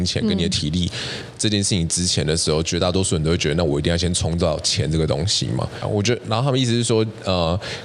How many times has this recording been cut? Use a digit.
1